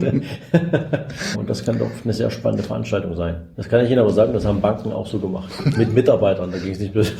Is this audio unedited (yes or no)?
no